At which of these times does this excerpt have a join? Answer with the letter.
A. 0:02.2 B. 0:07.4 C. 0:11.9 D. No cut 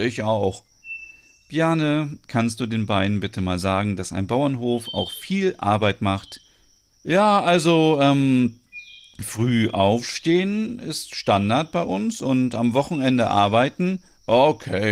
D